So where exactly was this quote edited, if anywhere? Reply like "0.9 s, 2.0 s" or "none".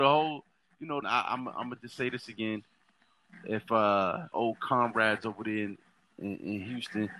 1.0 s, 4.3 s